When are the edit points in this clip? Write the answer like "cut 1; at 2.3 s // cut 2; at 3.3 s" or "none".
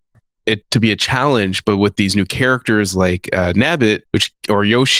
cut 1; at 4.1 s